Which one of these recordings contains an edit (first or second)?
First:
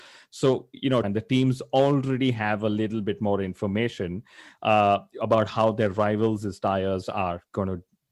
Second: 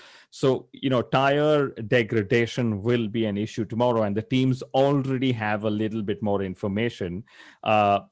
first